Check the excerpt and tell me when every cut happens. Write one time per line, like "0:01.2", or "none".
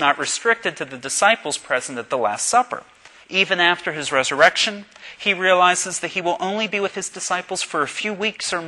0:03.2